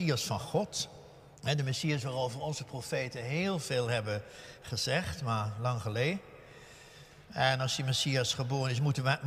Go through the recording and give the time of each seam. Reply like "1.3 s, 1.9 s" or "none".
1.3 s, 7.3 s

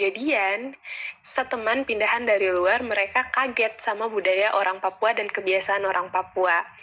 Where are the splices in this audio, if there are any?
none

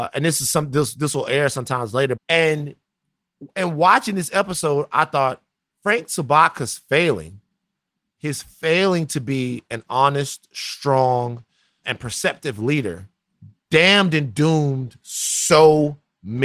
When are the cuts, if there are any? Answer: 2.2 s, 11.8 s

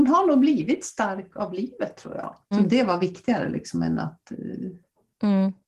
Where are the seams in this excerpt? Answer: 2.5 s

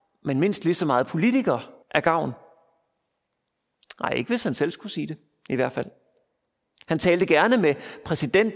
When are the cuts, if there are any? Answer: 1.8 s

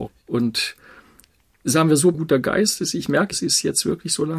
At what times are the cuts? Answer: 2.1 s

